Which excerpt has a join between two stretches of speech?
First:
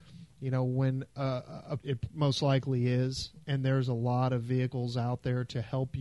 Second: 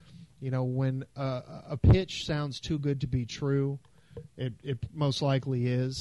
first; 1 cut; at 1.8 s

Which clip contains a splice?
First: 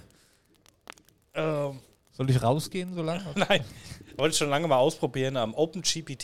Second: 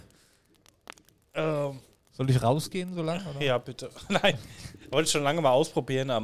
first; 1 cut; at 3.3 s

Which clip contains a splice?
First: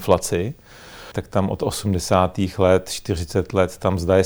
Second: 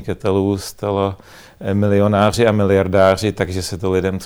first; 1 cut; at 1.1 s

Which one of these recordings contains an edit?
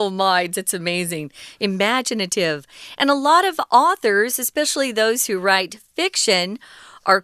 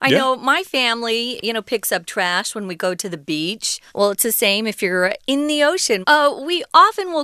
second; 2 cuts; at 3.9 s, 6.0 s

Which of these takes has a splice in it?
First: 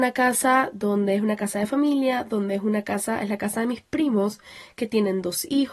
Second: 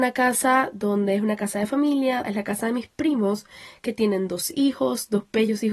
second; 1 cut; at 2.2 s

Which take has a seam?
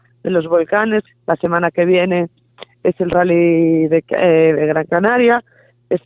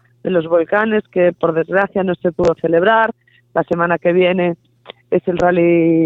first; 1 cut; at 1.1 s

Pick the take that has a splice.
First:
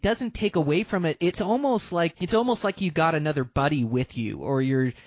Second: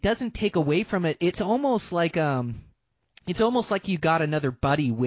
first; 1 cut; at 2.1 s

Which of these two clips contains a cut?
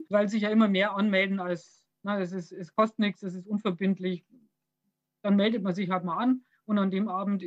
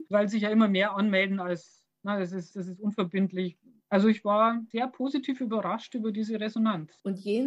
second; 2 cuts; at 2.5 s, 3.8 s

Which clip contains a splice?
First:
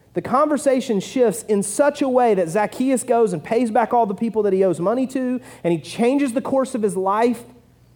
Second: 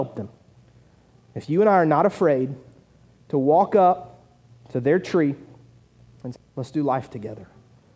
second; 1 cut; at 6.4 s

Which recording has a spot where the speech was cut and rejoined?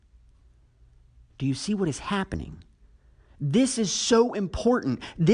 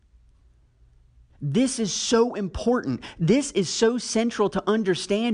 second; 1 cut; at 1.3 s

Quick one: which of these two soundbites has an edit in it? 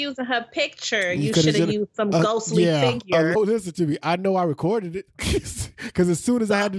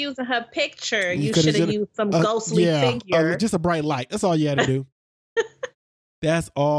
first; 1 cut; at 3.4 s

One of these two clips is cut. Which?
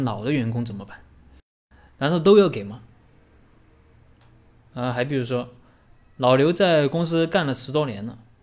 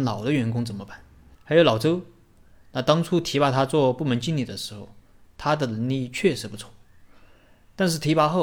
second; 1 cut; at 1.3 s

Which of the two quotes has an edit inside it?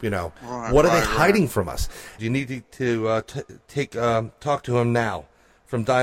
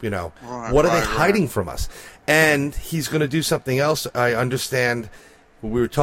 first; 1 cut; at 2.2 s

